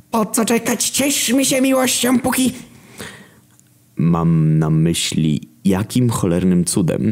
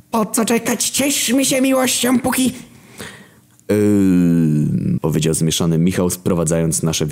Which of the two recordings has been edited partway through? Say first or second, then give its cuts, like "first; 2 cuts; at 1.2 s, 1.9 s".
second; 2 cuts; at 3.6 s, 5.0 s